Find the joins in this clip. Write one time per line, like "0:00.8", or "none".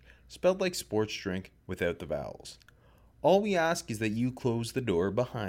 none